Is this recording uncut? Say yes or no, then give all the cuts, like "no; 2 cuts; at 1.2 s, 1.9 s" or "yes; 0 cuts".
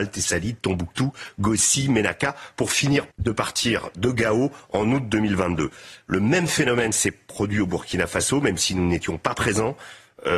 no; 1 cut; at 3.1 s